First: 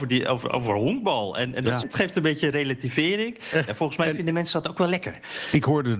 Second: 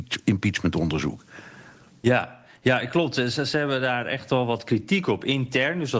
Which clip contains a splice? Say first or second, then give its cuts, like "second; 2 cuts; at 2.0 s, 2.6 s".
first; 2 cuts; at 1.8 s, 3.7 s